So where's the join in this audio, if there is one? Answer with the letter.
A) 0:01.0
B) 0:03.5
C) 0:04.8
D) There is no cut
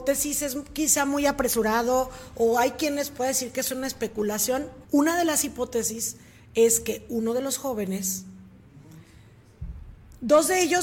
C